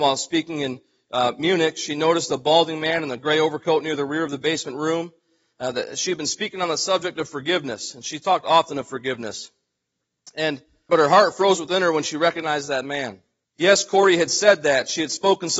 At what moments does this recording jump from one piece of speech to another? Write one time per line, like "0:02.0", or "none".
0:10.9
0:13.4